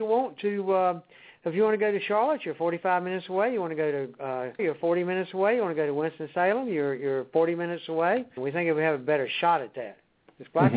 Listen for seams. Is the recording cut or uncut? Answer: cut